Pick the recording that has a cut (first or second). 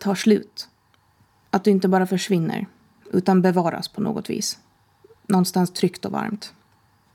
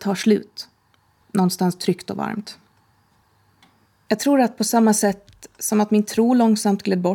second